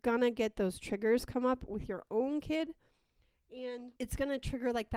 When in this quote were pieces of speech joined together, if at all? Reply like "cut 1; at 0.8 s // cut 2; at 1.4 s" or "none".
cut 1; at 4.0 s

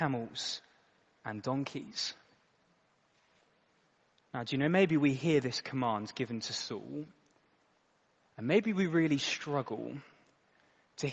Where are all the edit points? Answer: none

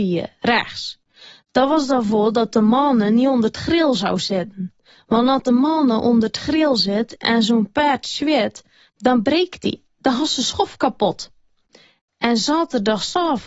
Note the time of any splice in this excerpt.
none

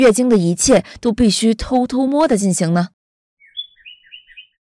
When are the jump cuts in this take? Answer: cut 1; at 2.1 s

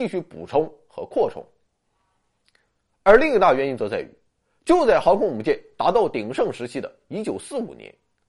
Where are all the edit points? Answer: none

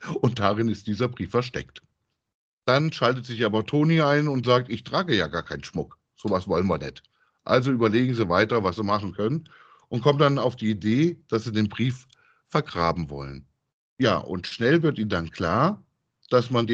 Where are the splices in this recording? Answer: none

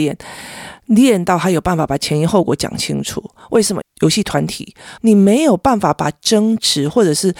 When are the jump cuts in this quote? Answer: cut 1; at 3.8 s // cut 2; at 5.0 s

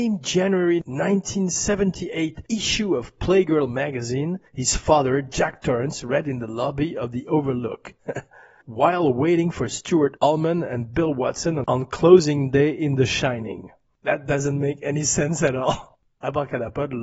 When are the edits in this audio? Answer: cut 1; at 8.0 s

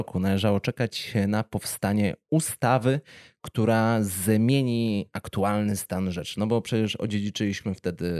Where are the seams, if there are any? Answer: none

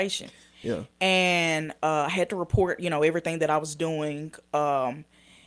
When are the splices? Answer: none

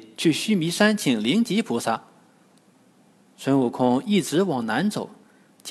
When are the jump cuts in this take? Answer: none

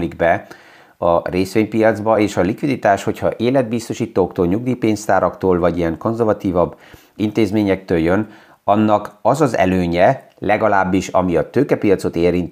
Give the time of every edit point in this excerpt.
none

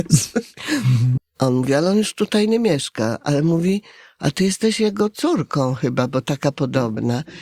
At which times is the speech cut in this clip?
cut 1; at 1.2 s

